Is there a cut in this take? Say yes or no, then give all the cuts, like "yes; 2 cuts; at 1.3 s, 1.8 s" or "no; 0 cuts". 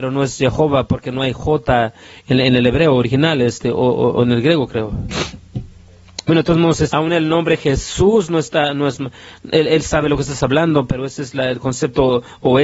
yes; 1 cut; at 6.9 s